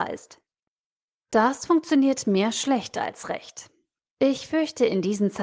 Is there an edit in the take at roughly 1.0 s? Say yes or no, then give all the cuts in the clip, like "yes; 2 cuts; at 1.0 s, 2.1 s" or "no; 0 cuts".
no; 1 cut; at 4.0 s